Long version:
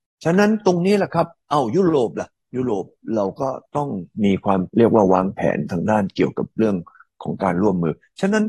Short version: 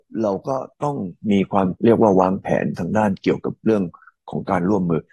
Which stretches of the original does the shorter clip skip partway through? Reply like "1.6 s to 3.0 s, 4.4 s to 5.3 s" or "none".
none